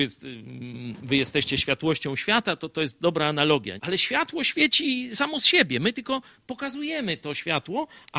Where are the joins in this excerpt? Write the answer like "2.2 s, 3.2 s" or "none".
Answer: 3.8 s

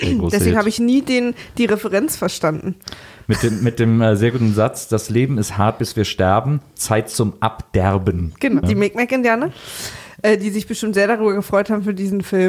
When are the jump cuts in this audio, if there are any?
8.6 s

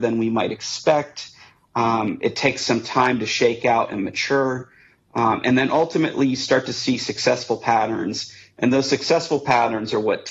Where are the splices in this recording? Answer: none

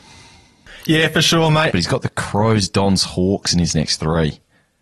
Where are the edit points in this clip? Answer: 1.7 s

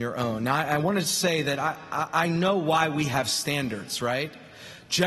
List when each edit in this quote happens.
none

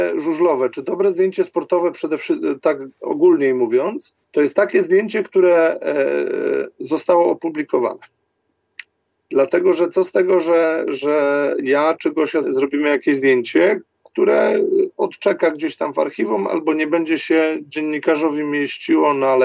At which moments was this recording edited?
4.2 s, 12.4 s

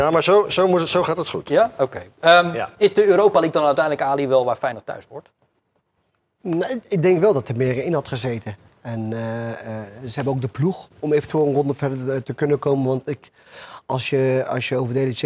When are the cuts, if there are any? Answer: none

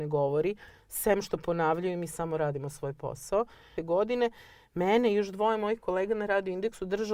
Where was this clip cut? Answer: 3.8 s

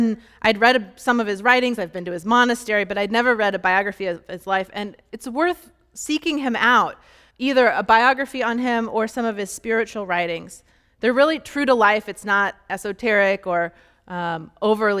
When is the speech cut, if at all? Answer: 7.3 s

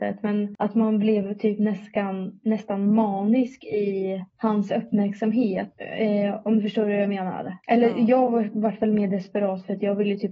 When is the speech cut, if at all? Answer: none

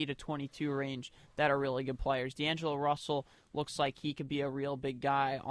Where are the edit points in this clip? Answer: none

